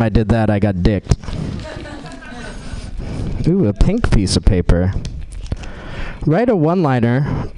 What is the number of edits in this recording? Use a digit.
0